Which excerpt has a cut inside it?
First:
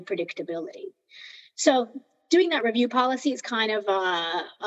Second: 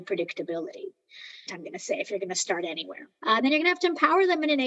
second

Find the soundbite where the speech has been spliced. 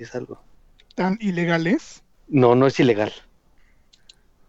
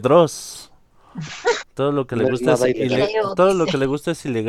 second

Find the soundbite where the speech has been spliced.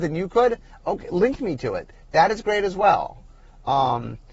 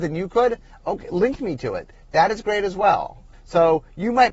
second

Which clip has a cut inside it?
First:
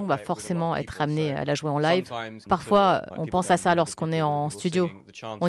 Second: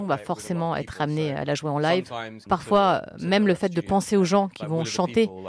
first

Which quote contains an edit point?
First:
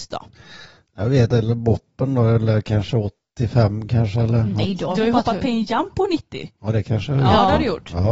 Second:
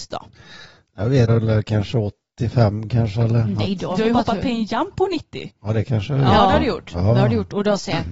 second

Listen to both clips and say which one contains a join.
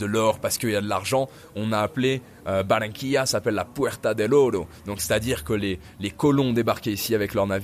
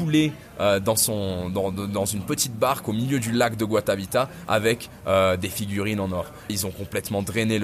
second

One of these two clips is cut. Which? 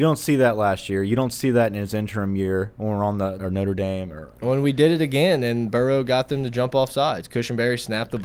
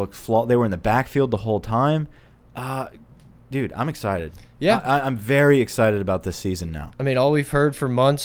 first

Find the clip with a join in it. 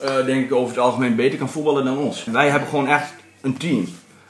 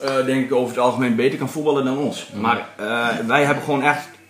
first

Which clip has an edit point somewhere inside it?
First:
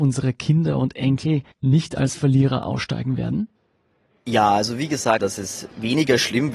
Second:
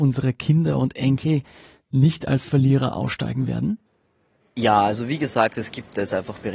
first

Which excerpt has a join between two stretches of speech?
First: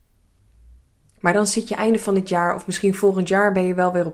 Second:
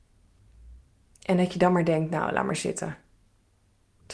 first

